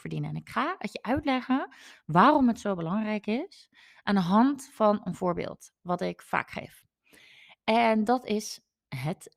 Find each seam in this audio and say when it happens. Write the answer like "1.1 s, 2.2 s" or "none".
none

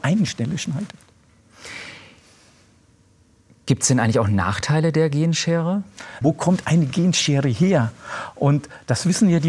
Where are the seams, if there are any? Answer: 6.2 s

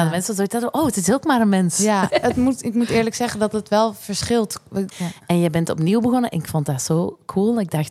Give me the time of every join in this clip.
2.1 s, 4.9 s

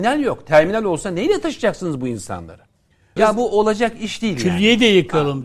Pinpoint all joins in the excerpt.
3.2 s

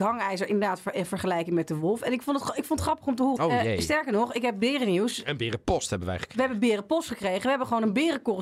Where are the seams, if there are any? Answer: 3.4 s

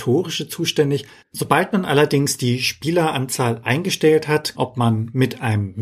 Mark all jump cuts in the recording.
1.2 s, 4.5 s

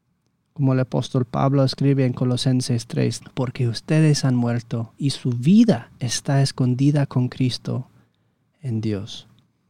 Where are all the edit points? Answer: 3.2 s, 4.9 s

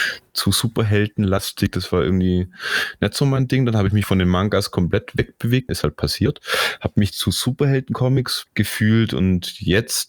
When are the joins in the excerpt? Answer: 5.7 s, 8.5 s

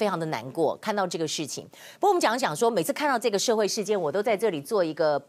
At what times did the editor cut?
none

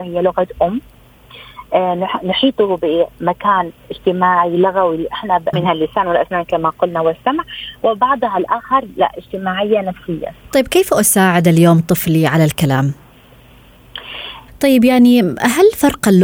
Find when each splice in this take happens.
5.5 s, 14.5 s

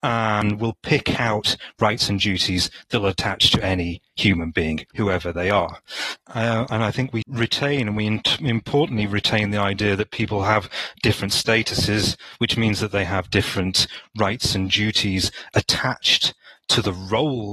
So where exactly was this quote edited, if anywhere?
4.9 s, 6.2 s, 7.2 s

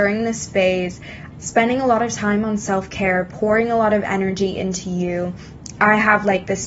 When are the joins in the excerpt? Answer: 1.3 s

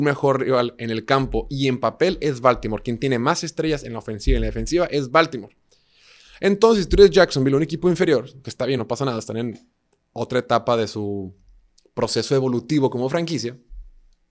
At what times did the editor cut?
none

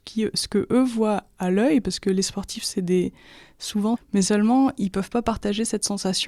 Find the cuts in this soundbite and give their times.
4.0 s

